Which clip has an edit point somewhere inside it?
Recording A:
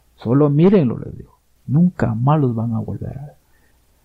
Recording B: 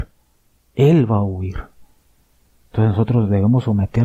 A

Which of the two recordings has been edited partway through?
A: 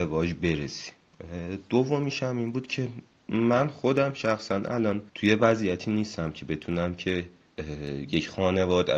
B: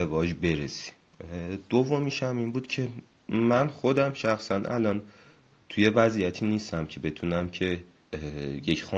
A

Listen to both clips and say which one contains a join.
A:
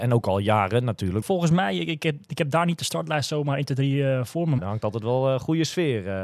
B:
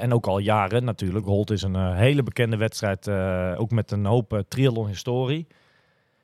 A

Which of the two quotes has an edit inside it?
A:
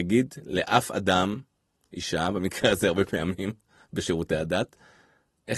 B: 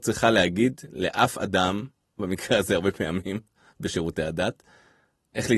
B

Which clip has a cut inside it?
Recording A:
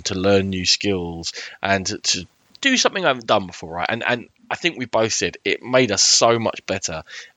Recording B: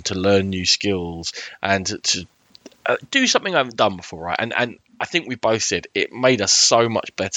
A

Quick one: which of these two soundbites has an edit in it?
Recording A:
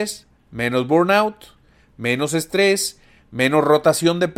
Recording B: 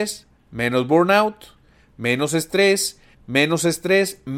B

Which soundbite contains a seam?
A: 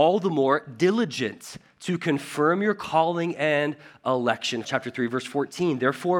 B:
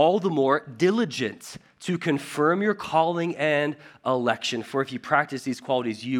A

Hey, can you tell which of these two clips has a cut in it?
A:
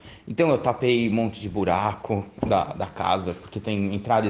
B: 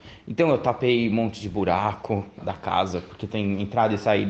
B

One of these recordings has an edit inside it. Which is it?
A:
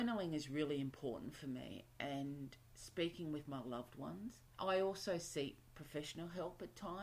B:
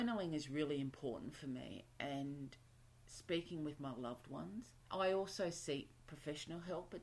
A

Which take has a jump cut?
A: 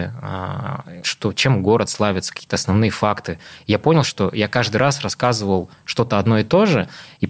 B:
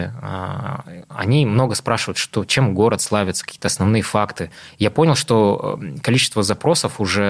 A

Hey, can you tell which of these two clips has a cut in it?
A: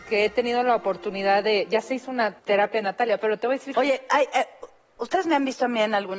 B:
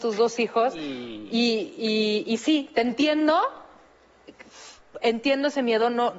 A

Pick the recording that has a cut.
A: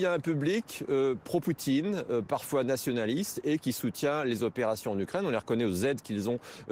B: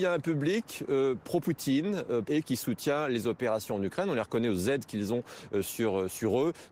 B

